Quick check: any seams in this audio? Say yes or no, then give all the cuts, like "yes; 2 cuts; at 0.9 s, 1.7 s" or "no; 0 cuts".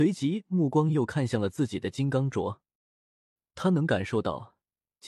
no; 0 cuts